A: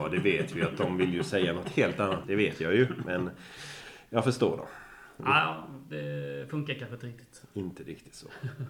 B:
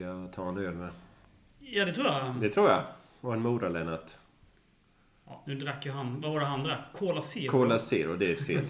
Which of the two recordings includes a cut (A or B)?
A